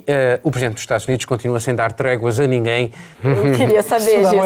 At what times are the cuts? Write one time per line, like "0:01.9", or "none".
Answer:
0:03.1